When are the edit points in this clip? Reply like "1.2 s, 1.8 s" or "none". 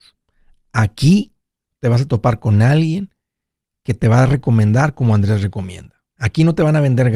none